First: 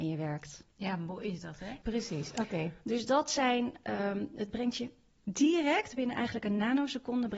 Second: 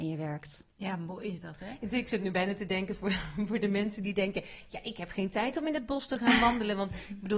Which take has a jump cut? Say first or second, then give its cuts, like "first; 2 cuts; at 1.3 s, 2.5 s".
first; 1 cut; at 1.8 s